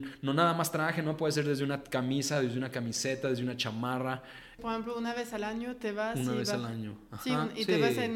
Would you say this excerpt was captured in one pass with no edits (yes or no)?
no